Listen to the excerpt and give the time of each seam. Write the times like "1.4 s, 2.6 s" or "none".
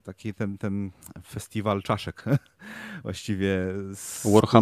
none